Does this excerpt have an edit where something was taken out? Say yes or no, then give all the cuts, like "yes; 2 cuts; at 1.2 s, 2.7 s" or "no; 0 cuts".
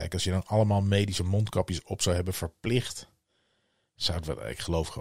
no; 0 cuts